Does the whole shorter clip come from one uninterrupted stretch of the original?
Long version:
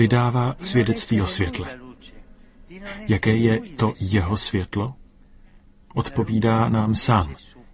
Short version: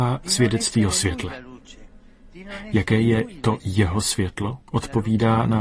no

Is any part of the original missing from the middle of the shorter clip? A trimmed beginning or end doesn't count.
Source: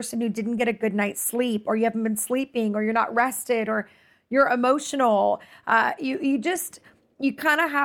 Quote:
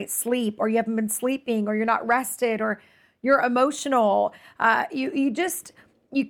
no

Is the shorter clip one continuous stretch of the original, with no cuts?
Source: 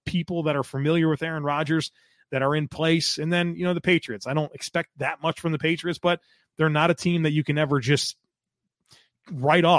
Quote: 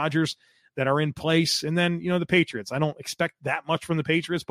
yes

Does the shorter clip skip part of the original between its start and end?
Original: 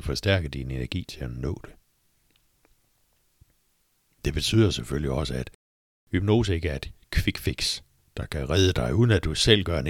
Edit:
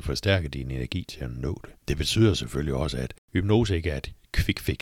yes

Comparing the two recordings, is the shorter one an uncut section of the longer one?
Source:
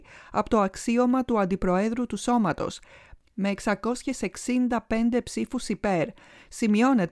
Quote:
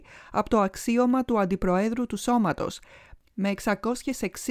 yes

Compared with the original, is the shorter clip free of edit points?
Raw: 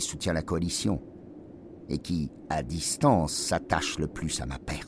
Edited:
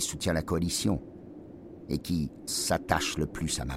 no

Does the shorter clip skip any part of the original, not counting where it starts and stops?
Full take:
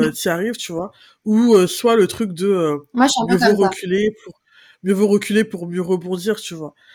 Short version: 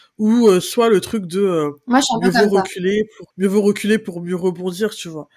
yes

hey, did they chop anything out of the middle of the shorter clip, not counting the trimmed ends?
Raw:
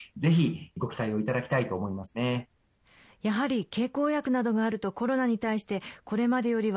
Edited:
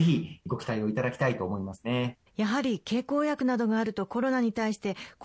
yes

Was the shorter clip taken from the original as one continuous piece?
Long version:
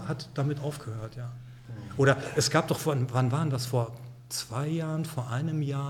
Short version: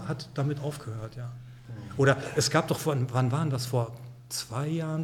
yes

